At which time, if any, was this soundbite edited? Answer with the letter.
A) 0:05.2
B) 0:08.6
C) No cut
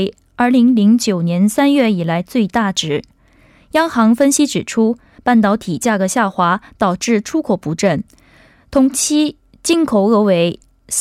A